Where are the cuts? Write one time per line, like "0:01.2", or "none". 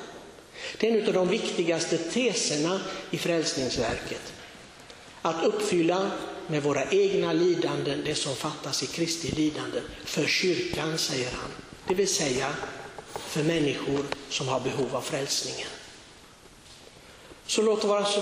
none